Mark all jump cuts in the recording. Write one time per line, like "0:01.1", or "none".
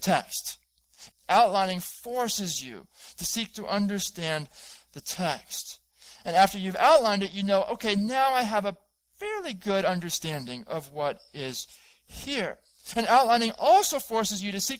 0:01.1